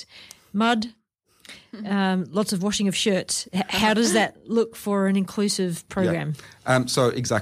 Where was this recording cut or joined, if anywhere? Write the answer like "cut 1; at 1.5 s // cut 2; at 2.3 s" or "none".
none